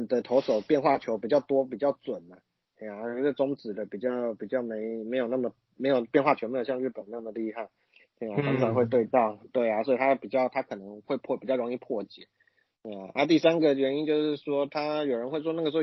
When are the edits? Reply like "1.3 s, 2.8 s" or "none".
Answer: 8.0 s